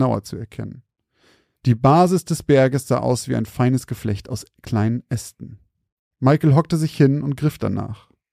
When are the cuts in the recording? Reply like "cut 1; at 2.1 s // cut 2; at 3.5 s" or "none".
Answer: none

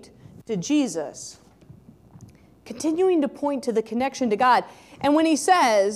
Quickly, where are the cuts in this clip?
none

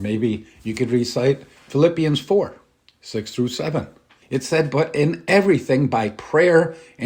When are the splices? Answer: cut 1; at 4.2 s

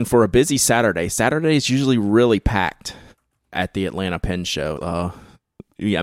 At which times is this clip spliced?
cut 1; at 4.8 s

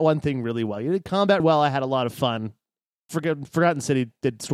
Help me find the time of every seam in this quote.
cut 1; at 1.4 s

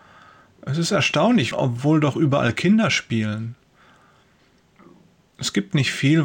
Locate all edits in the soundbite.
cut 1; at 1.5 s

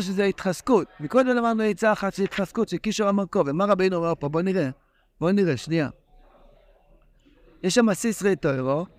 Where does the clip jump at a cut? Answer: none

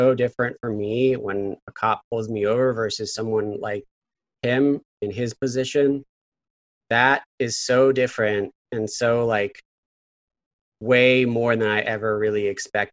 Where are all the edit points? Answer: none

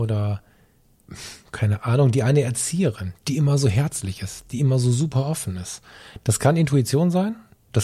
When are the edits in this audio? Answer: none

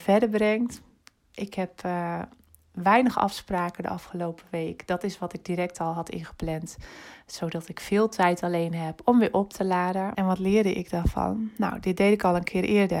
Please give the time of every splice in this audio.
cut 1; at 10.1 s

